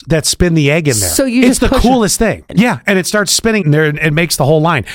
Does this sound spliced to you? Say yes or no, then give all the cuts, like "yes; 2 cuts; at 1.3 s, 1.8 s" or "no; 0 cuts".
yes; 2 cuts; at 2.5 s, 3.6 s